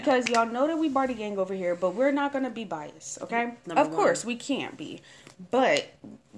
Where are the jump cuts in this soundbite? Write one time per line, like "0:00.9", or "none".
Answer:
0:03.6

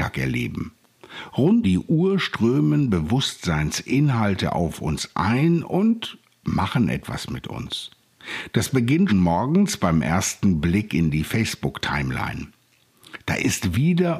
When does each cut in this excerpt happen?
0:01.6
0:09.1

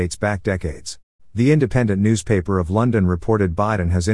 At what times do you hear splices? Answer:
0:01.2

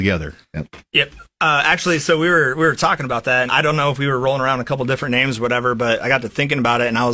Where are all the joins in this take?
0:03.5

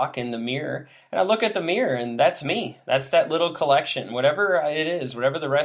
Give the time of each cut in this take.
none

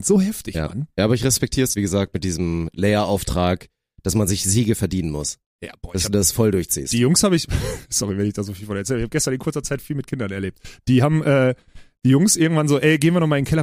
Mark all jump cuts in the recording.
0:01.7

